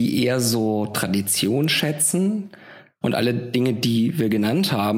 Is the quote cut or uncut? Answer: cut